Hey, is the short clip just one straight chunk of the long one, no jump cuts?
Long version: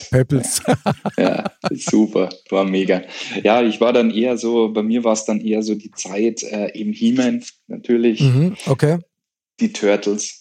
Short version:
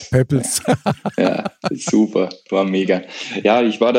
yes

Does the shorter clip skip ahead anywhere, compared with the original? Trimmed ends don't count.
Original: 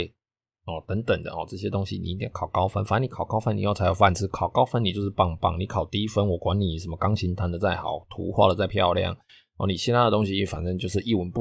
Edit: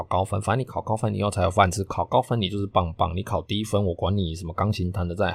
no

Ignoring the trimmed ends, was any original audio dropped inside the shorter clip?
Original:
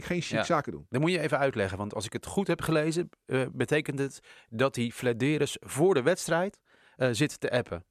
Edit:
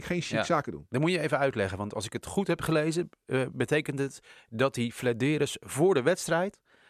no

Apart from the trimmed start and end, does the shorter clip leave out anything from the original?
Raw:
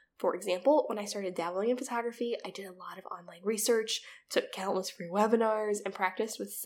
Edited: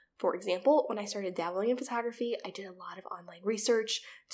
no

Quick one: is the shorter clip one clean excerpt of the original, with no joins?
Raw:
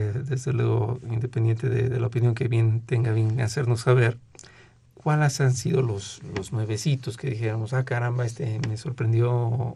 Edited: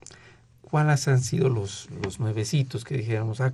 yes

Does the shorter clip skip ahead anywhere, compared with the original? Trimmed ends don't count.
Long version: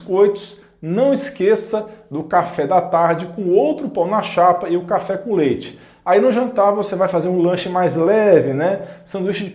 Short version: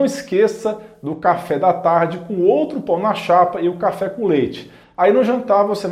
no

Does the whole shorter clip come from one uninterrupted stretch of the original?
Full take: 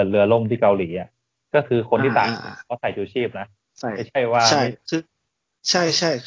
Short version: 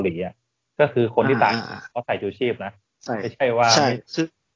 yes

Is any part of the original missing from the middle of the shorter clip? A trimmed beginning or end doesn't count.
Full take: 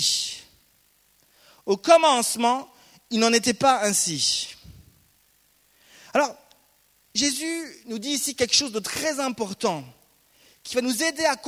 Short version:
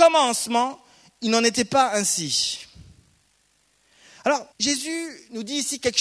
yes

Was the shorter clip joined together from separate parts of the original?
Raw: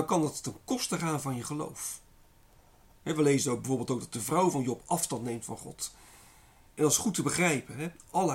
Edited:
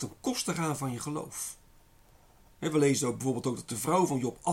no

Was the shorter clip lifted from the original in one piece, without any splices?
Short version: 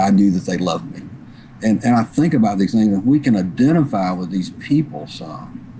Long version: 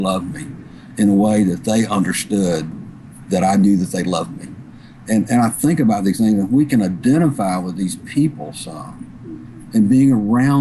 yes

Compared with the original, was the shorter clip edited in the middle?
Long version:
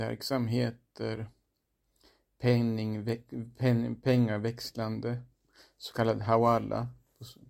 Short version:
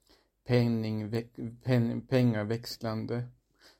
no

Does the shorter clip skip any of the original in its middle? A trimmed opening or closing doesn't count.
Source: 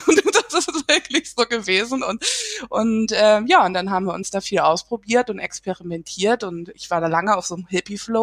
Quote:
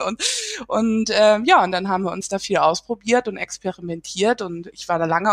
no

